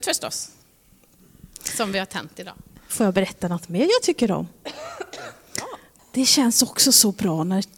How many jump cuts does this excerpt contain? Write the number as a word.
one